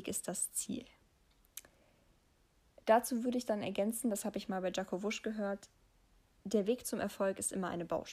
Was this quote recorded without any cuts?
yes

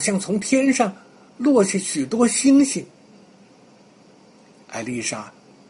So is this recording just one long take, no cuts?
yes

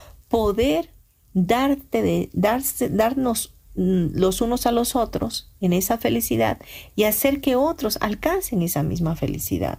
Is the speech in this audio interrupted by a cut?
no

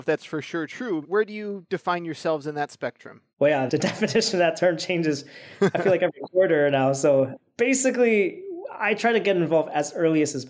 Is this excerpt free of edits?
no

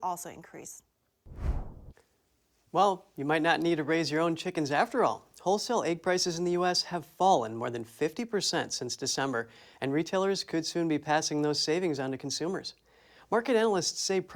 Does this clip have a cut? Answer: no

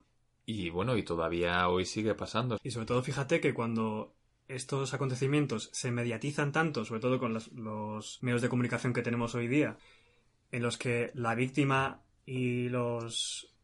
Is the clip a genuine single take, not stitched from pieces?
no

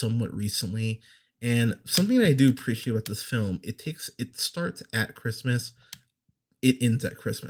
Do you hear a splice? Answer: no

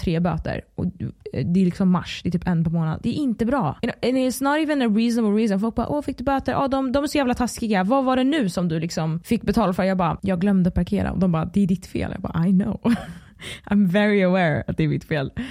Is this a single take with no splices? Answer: yes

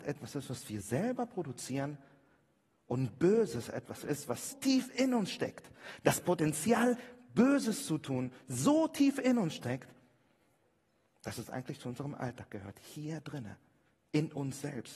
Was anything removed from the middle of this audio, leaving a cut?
yes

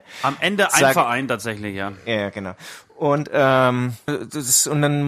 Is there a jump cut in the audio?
yes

